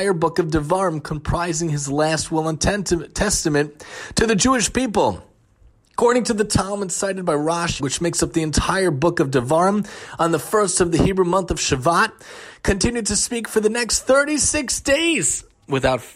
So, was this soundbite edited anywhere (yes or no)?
yes